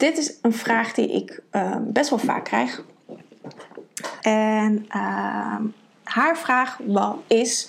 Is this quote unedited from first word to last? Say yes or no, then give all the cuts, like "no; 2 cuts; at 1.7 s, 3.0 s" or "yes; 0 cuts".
no; 1 cut; at 4.2 s